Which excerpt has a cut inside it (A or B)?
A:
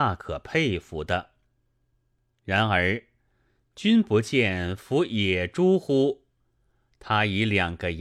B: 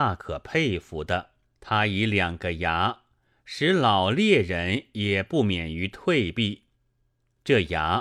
B